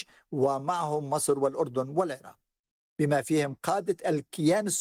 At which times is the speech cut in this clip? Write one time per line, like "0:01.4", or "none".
0:02.8